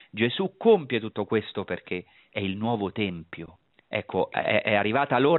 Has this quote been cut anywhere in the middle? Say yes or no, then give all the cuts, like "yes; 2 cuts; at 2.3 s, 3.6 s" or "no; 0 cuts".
yes; 1 cut; at 3.8 s